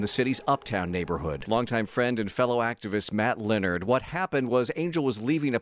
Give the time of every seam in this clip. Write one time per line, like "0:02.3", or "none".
0:01.4